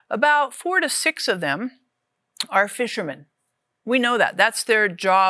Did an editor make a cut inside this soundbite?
no; 0 cuts

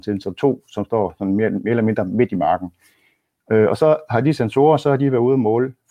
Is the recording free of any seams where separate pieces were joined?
yes; 0 cuts

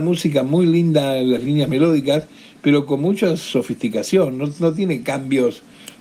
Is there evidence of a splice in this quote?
no; 0 cuts

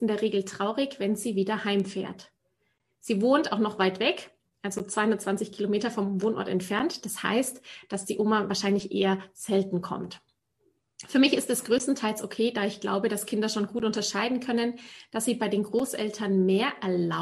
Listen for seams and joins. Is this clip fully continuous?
yes; 0 cuts

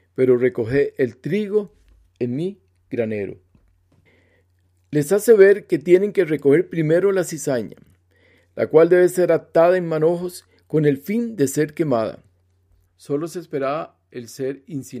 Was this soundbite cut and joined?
yes; 1 cut; at 12.9 s

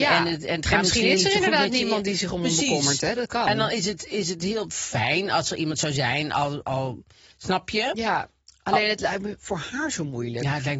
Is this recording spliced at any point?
no; 0 cuts

